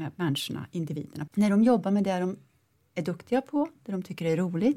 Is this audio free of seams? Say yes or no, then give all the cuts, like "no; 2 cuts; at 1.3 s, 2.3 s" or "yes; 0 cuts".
no; 1 cut; at 1.3 s